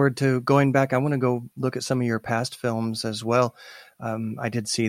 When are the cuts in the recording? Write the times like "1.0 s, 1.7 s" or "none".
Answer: none